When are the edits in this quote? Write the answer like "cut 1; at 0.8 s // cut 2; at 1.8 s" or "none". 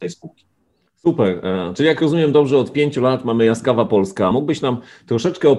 none

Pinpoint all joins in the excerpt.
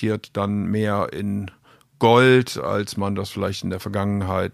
none

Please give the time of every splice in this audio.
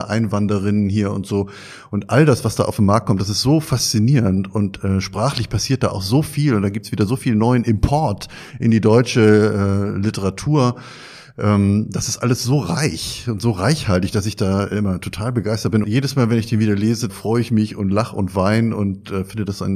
cut 1; at 15.8 s // cut 2; at 17.1 s

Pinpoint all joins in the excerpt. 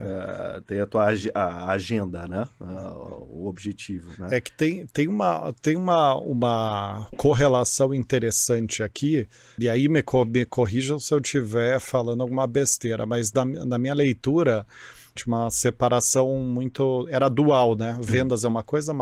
cut 1; at 9.6 s // cut 2; at 15.2 s

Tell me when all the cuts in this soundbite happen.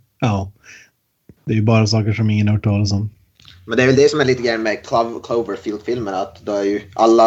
none

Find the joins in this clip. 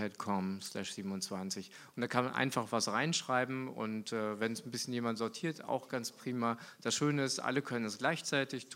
none

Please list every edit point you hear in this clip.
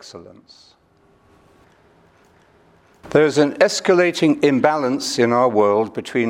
none

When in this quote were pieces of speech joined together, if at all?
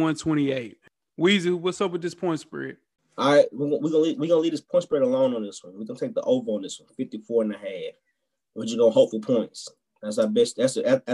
none

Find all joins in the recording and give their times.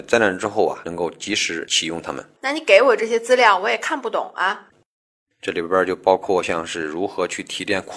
cut 1; at 2.4 s // cut 2; at 5.2 s

